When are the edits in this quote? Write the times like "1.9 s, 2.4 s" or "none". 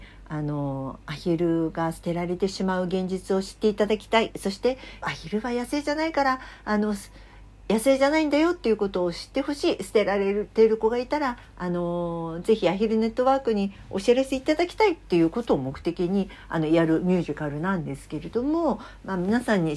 5.0 s